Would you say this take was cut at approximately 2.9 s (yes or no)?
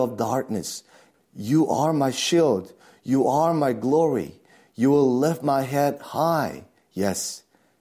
no